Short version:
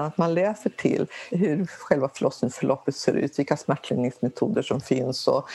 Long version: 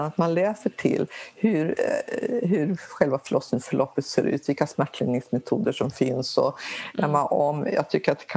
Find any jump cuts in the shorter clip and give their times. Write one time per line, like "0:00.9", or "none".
0:01.3